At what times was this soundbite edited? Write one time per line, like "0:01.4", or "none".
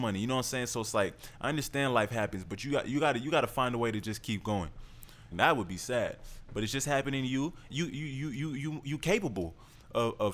0:05.3
0:07.7